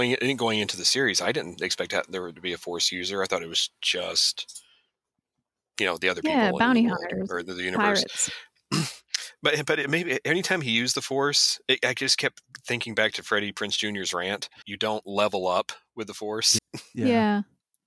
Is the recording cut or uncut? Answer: cut